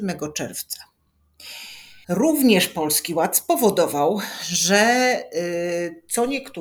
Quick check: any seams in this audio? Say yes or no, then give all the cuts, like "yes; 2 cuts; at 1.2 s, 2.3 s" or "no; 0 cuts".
yes; 1 cut; at 2.0 s